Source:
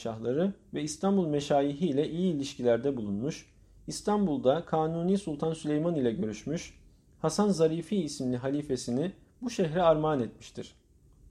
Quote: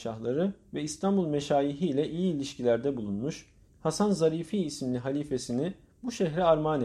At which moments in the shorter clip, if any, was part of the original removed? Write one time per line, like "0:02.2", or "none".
0:03.7